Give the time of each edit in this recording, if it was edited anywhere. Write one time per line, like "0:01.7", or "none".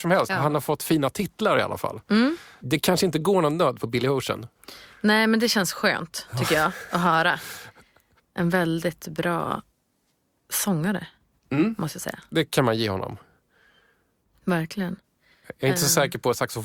none

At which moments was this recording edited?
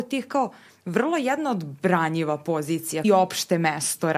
0:03.0

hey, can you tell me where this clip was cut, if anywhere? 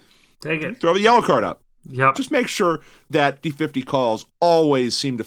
0:02.1
0:03.4

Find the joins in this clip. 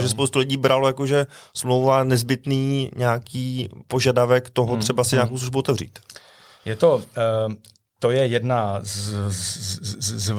none

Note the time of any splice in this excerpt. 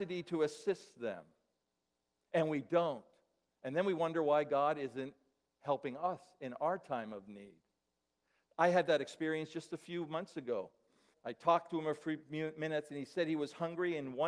0:11.1

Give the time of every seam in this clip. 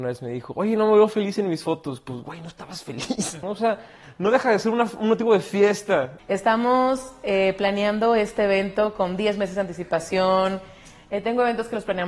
0:03.4
0:06.2

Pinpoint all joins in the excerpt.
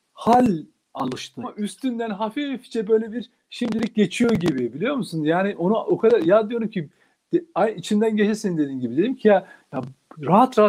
0:01.4

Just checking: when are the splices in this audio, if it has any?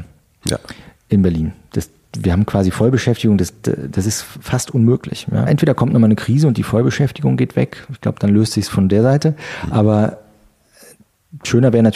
0:05.5

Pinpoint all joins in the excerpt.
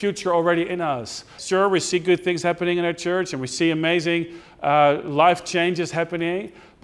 0:01.4

